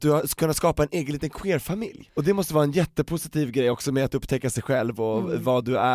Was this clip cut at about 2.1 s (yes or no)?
yes